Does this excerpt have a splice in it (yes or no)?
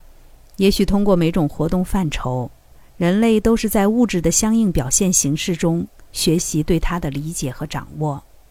no